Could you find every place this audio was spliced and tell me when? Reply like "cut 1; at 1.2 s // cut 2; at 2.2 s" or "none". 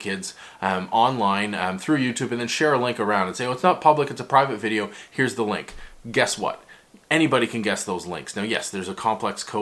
none